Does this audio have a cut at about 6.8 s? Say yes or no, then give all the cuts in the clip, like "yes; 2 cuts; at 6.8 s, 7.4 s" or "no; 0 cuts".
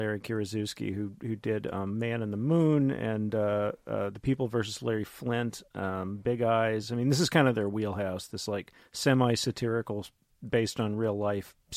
no; 0 cuts